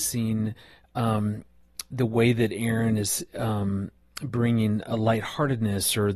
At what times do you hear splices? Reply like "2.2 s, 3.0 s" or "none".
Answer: none